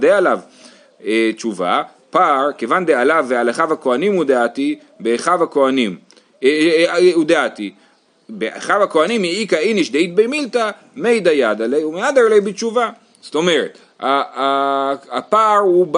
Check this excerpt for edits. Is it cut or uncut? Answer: uncut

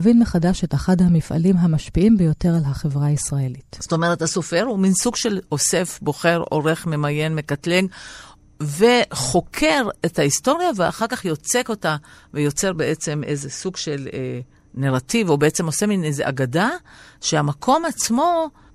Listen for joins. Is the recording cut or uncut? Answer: uncut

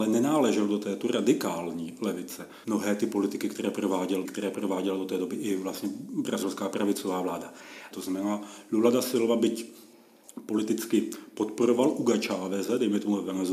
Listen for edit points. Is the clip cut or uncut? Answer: cut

